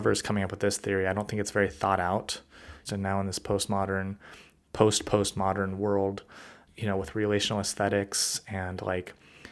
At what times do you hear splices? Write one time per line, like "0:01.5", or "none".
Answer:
0:02.9
0:06.7